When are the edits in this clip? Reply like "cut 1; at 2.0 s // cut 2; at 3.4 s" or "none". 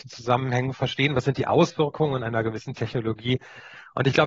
none